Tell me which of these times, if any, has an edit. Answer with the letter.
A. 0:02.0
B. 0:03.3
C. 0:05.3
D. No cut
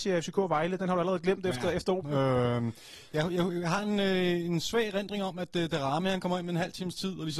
A